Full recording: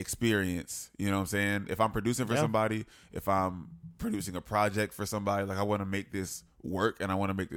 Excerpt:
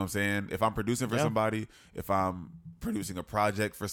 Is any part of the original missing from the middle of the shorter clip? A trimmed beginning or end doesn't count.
no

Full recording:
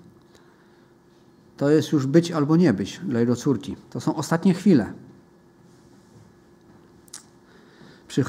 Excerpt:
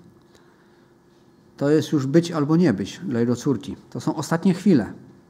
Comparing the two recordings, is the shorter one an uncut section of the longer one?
yes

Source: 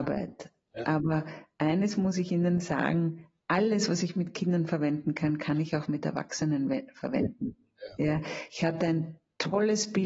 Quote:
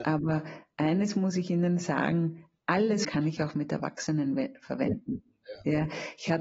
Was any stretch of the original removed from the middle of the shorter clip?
yes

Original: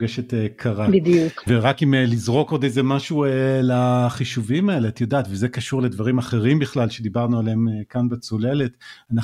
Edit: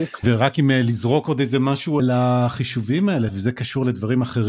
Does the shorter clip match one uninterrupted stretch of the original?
no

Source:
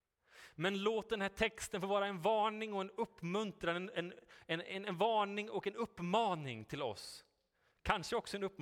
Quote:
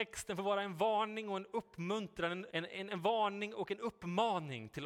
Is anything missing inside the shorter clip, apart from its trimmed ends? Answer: yes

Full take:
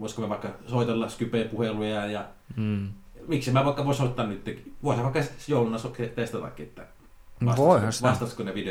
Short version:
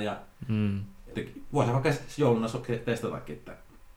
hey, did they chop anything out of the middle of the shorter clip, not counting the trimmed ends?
yes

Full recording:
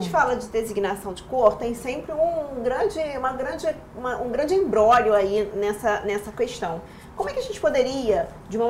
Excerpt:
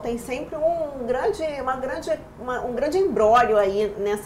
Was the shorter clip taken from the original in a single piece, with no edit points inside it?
yes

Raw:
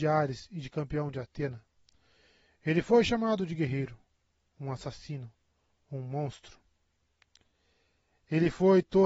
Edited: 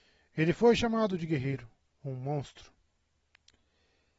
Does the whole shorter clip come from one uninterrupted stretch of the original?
no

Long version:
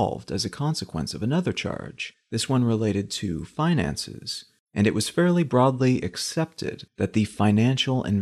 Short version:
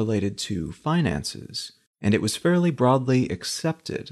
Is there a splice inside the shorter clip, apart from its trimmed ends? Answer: no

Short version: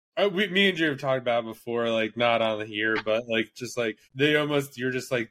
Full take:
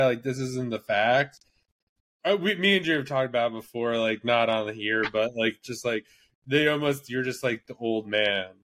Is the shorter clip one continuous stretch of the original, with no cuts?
no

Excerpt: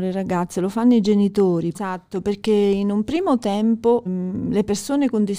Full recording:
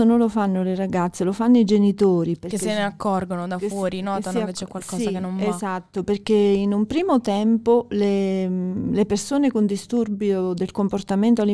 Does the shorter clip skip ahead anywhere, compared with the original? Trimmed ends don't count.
yes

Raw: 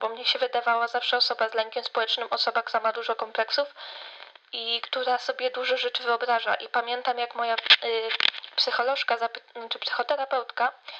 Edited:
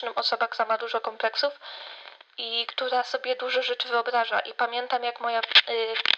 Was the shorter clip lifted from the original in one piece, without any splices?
yes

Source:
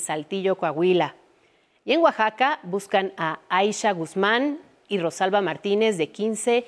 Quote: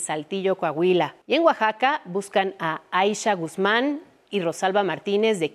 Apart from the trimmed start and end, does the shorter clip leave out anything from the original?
yes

